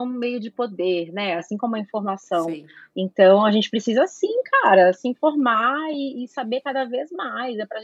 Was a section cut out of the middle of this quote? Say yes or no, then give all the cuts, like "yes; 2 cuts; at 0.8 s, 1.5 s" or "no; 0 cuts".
yes; 1 cut; at 1.4 s